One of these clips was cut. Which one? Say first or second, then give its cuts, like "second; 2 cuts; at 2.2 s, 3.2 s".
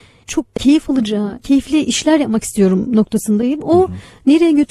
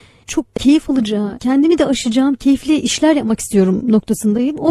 first; 1 cut; at 1.4 s